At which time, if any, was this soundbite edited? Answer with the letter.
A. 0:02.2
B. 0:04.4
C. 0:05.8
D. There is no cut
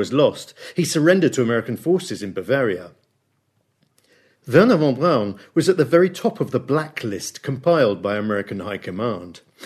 D